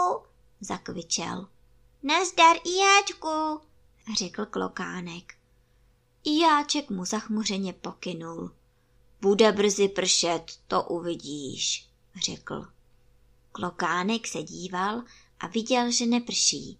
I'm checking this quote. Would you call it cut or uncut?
cut